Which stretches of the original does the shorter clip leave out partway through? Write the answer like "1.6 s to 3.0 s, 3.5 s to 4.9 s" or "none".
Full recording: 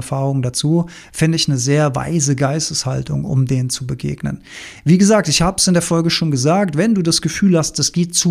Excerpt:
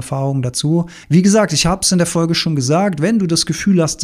1.0 s to 4.8 s